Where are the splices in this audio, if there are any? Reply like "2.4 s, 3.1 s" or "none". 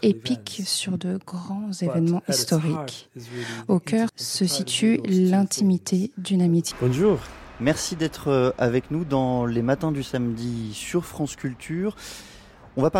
4.1 s, 6.7 s